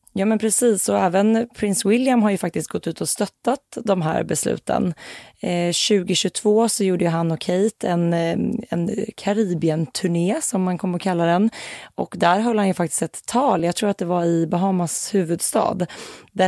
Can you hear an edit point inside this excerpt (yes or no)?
no